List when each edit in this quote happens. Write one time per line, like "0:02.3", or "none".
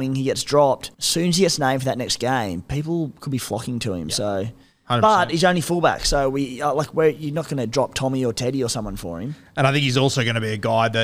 0:00.9